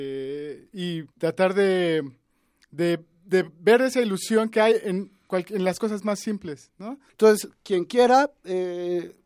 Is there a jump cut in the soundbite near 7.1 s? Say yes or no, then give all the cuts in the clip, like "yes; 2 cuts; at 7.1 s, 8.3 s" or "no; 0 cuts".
yes; 2 cuts; at 1.1 s, 7.1 s